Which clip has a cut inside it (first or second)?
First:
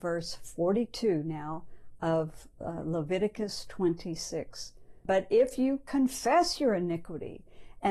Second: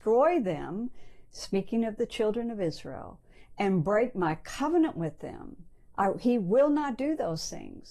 first